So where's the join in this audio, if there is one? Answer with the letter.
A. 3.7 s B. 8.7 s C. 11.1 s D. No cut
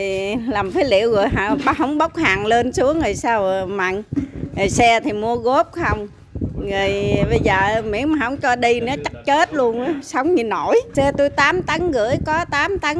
D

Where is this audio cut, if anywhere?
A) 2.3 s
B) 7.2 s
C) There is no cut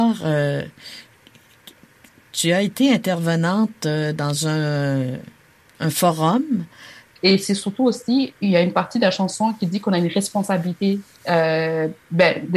B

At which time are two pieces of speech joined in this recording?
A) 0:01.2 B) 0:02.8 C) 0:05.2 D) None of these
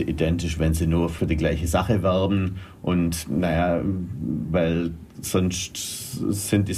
A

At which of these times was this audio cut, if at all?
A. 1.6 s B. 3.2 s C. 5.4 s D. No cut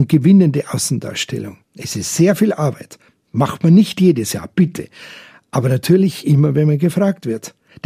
A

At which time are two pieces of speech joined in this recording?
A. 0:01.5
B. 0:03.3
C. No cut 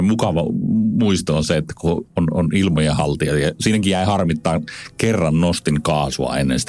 C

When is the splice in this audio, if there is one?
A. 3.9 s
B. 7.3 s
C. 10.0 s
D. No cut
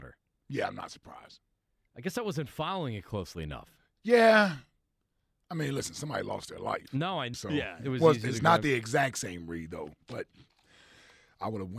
B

